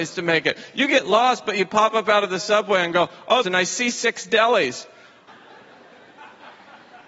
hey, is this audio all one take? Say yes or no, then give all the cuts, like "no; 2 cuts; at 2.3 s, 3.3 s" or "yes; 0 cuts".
no; 2 cuts; at 3.4 s, 5.3 s